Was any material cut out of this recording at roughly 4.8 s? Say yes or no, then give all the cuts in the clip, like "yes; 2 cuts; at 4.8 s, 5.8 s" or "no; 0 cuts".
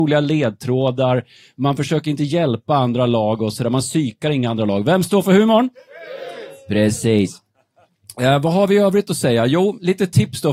no; 0 cuts